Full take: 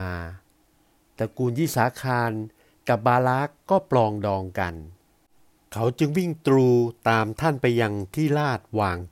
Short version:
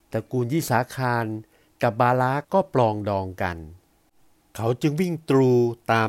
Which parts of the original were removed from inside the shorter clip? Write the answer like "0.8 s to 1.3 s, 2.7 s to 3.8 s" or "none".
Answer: 3.5 s to 3.6 s